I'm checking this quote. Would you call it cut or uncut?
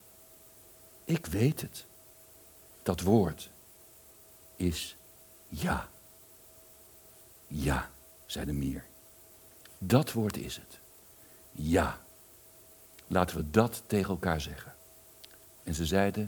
uncut